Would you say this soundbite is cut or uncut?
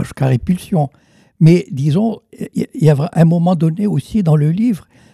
uncut